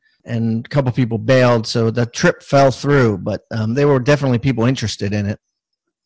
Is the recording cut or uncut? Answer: uncut